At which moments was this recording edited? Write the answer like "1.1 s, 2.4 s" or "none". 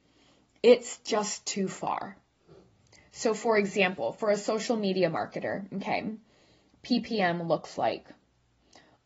none